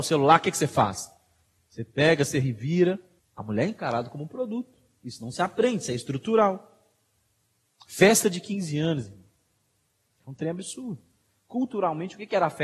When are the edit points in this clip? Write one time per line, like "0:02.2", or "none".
0:03.2